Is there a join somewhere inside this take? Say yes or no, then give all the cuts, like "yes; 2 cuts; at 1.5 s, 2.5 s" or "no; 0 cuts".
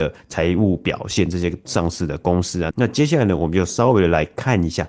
yes; 1 cut; at 2.7 s